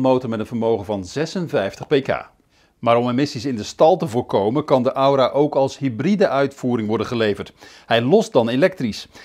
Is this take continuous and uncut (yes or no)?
yes